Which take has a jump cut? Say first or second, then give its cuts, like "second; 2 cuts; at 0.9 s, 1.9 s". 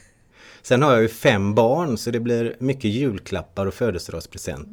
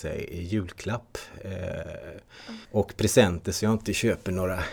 second; 1 cut; at 2.6 s